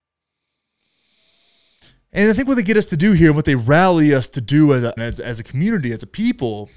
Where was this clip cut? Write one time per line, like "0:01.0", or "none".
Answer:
0:05.0